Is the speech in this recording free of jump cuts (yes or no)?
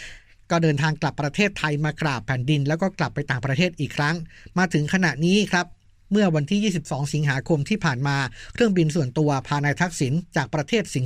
yes